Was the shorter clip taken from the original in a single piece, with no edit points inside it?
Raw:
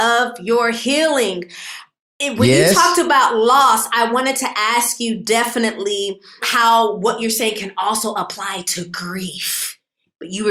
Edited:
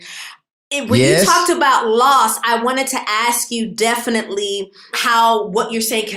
yes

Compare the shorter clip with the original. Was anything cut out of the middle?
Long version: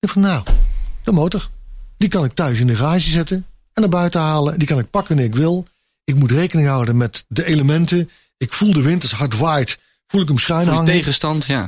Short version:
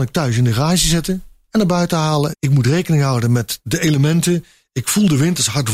yes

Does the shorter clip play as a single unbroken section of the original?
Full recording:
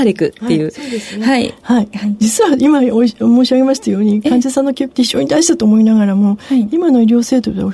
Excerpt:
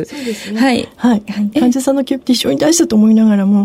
no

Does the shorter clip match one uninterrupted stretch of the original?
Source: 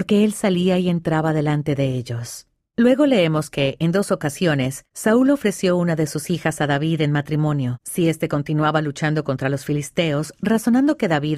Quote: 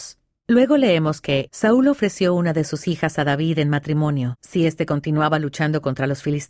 no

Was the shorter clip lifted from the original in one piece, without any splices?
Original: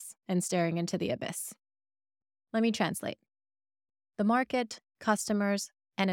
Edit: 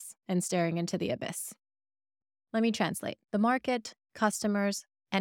no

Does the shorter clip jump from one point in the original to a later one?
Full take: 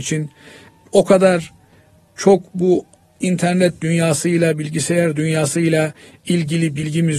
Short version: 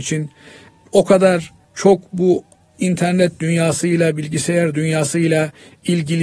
yes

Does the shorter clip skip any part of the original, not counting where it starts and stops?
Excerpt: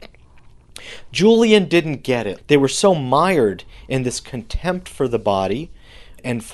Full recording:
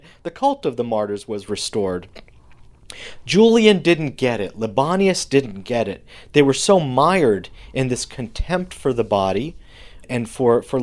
yes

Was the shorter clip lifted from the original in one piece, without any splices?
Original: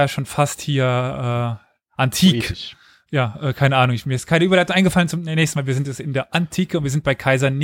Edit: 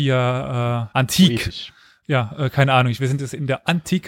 no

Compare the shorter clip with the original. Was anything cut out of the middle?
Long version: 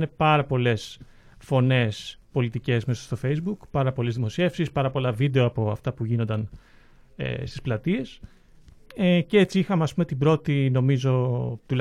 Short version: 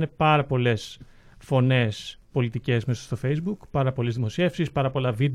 no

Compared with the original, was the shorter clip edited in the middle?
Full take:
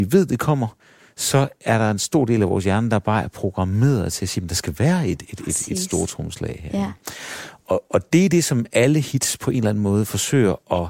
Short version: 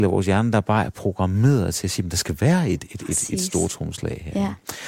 no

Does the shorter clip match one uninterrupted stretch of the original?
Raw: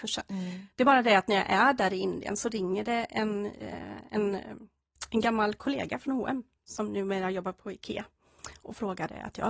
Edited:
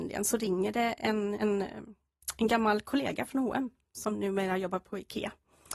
no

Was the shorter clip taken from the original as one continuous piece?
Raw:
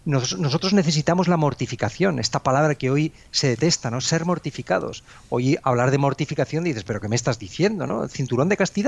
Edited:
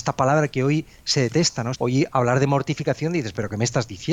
no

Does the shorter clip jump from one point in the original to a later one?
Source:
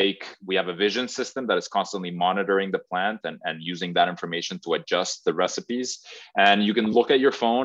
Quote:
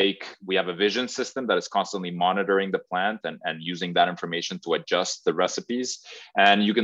no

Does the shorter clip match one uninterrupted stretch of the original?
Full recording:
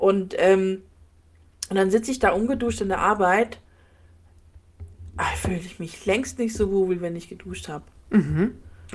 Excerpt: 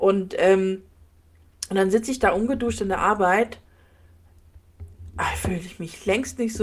yes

